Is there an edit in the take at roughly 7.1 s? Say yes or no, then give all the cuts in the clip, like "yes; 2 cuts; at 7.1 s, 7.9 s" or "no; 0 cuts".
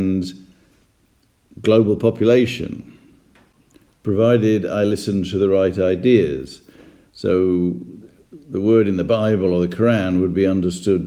yes; 1 cut; at 7.1 s